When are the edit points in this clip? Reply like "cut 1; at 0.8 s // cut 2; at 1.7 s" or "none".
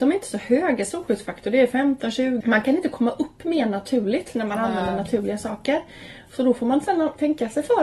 cut 1; at 2.4 s